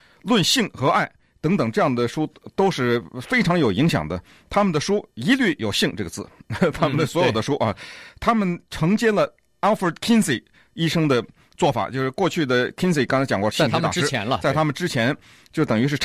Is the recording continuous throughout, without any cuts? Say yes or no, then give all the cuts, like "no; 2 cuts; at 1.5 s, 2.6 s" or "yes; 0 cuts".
yes; 0 cuts